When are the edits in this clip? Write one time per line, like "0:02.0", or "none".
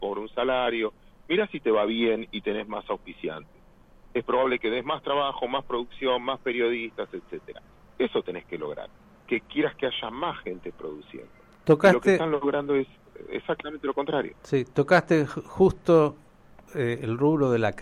none